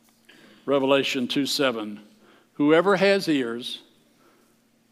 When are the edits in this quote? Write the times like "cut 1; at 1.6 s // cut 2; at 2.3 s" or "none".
none

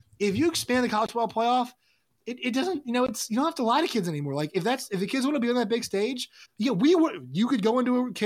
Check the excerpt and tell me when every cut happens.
cut 1; at 6.4 s

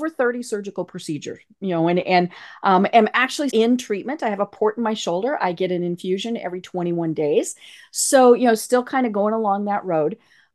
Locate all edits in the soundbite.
cut 1; at 3.5 s

